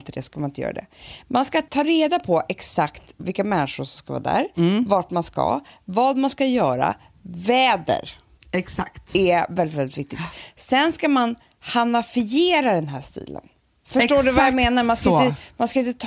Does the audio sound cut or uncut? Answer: uncut